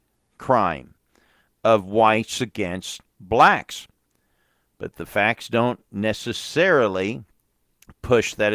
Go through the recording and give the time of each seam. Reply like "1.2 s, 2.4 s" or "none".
none

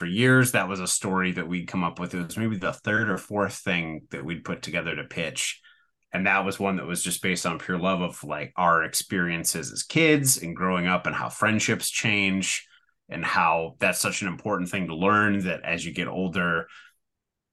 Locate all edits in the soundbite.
none

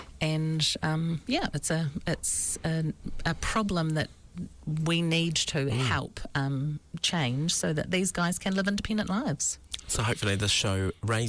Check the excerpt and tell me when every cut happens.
5.7 s

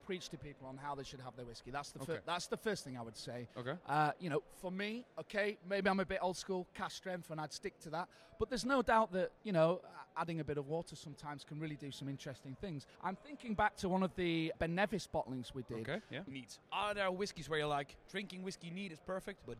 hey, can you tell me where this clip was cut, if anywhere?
16.3 s, 18.1 s

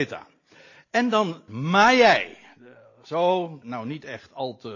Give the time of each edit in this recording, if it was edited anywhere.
1.5 s, 3.6 s

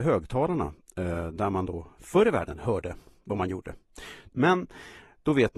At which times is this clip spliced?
4.3 s

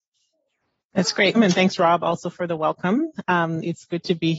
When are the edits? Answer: 1.3 s

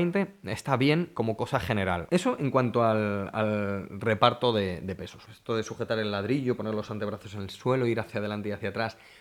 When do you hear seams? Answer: 2.1 s, 5.3 s

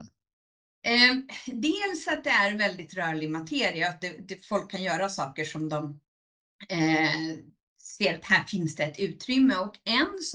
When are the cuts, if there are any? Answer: none

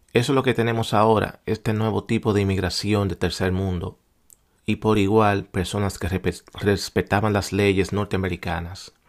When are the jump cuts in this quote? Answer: 4.6 s

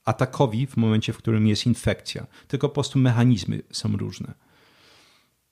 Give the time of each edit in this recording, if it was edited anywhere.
none

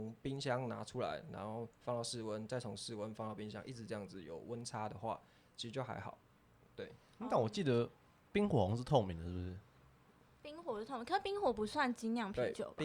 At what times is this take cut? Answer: none

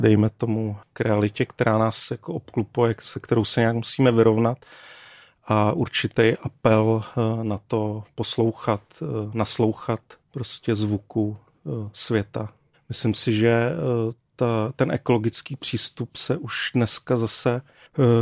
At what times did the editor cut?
12.7 s

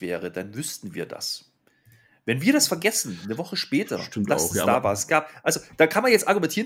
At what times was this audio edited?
none

